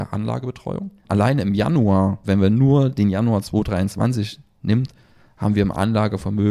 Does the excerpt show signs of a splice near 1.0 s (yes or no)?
yes